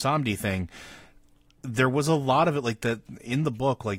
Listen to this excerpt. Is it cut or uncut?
uncut